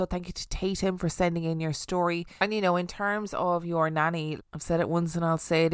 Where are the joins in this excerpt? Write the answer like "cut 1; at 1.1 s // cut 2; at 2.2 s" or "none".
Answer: cut 1; at 2.4 s // cut 2; at 4.4 s